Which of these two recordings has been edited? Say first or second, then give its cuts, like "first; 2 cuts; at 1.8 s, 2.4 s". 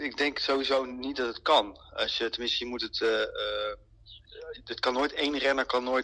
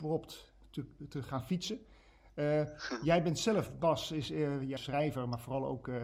second; 1 cut; at 4.8 s